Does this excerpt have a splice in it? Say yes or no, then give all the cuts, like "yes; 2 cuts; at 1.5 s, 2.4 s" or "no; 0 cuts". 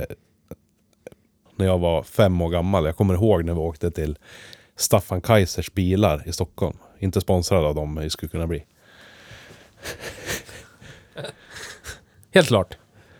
yes; 1 cut; at 1.5 s